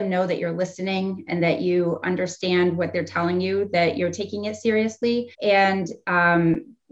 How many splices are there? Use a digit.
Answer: 1